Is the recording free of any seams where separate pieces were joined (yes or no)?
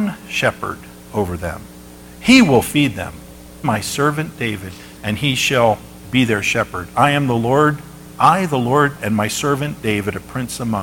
no